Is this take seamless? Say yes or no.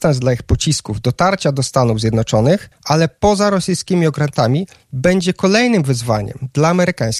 yes